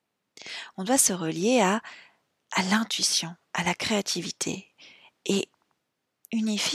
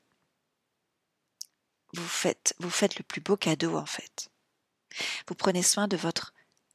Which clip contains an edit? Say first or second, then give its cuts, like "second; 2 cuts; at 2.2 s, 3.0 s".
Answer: second; 1 cut; at 5.2 s